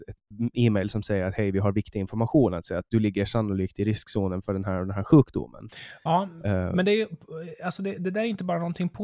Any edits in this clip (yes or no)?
no